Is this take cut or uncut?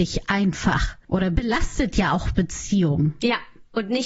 uncut